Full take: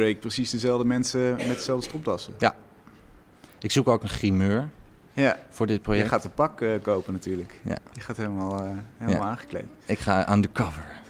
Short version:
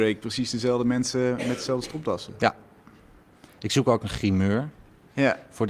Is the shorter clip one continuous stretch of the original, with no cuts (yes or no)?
yes